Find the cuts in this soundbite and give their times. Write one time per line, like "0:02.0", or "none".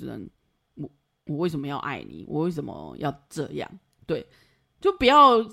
none